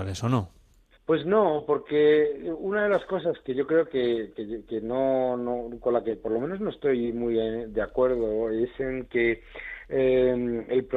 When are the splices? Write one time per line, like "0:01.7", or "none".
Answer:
none